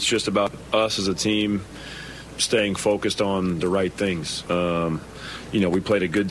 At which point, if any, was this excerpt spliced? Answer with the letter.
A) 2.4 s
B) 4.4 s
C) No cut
B